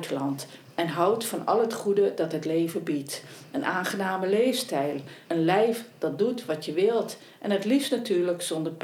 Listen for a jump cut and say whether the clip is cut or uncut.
cut